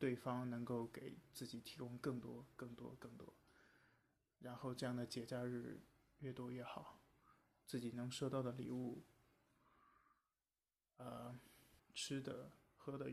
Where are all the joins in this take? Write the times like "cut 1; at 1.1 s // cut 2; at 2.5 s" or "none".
cut 1; at 11.8 s

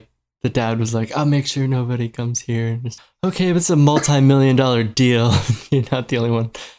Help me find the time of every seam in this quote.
none

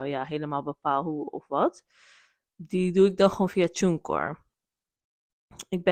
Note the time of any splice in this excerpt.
none

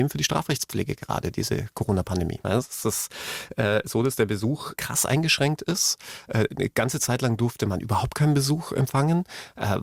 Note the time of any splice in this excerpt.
cut 1; at 2.4 s // cut 2; at 4.8 s

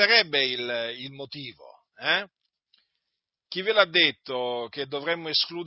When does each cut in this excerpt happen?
none

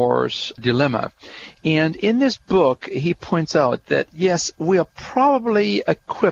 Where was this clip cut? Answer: none

